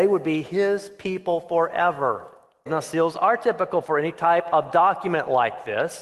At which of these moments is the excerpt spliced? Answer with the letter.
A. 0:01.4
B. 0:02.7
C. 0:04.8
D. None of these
B